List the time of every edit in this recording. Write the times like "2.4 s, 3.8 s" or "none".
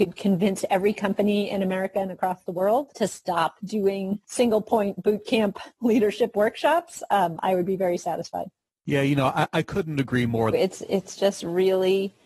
10.5 s